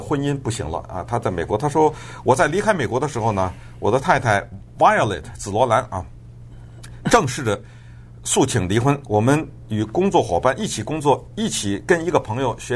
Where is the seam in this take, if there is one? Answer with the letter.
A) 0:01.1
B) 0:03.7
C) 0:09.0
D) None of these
C